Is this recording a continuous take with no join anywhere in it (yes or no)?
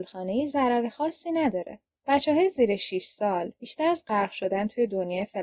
no